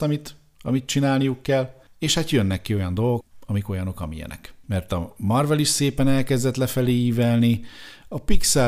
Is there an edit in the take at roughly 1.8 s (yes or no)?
no